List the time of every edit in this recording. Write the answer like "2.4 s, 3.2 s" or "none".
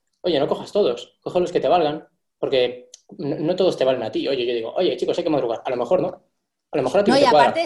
none